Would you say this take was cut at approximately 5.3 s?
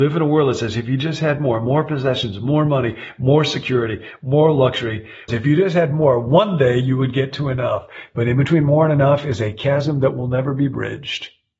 yes; 1 cut; at 5.3 s

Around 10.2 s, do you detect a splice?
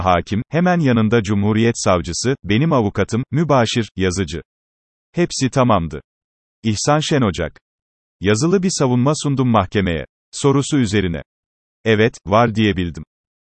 yes; 2 cuts; at 3.3 s, 10.2 s

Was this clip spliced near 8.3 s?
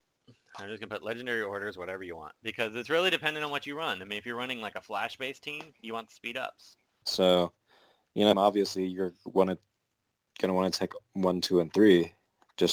yes; 2 cuts; at 7.0 s, 8.3 s

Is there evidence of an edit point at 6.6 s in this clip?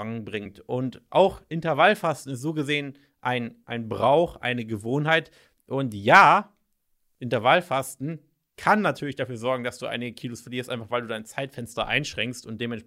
no; 1 cut; at 3.6 s

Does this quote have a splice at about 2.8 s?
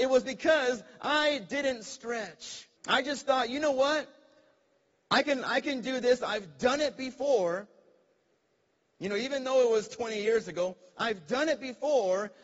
yes; 1 cut; at 2.8 s

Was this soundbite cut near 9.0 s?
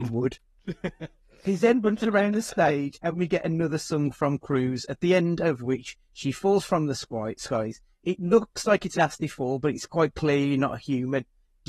yes; 1 cut; at 9.0 s

